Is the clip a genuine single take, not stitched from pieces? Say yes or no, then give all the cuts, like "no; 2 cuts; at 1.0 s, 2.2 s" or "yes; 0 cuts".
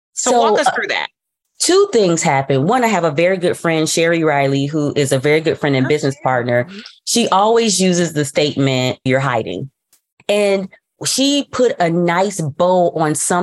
no; 1 cut; at 9.1 s